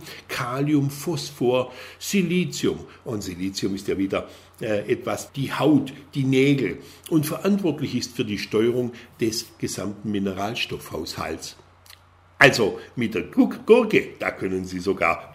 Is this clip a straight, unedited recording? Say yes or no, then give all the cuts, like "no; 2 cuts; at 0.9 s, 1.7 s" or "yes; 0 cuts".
no; 1 cut; at 5.3 s